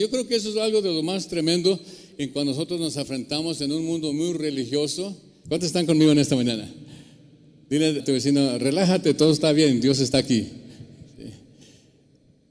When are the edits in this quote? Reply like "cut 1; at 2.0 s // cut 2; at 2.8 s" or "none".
cut 1; at 5.5 s // cut 2; at 8.0 s